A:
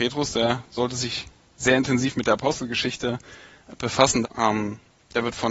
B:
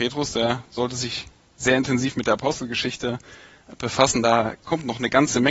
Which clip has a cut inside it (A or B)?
A